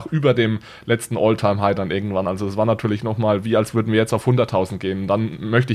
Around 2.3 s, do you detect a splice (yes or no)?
no